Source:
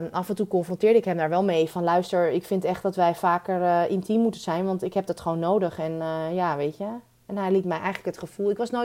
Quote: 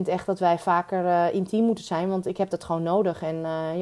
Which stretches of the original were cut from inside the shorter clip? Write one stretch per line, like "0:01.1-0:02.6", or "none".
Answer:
none